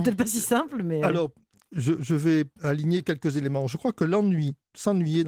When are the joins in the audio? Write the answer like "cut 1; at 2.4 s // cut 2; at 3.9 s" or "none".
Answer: cut 1; at 2.6 s